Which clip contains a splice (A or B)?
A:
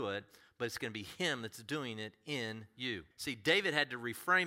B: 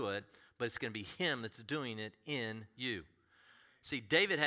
A